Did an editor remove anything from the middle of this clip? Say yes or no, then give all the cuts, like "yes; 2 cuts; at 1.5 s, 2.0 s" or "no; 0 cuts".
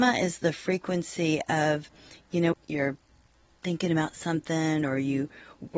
yes; 1 cut; at 2.5 s